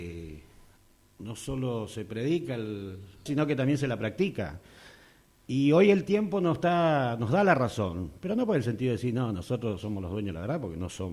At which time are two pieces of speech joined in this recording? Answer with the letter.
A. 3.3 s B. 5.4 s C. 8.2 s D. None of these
A